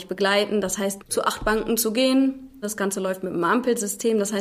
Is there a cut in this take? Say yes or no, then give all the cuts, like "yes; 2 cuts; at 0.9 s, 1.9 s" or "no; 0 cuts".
yes; 2 cuts; at 1.0 s, 2.6 s